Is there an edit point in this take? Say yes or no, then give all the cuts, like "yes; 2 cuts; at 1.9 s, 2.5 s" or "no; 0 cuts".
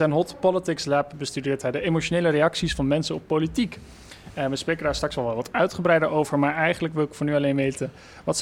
no; 0 cuts